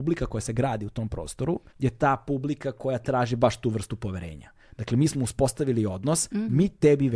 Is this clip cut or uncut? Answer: cut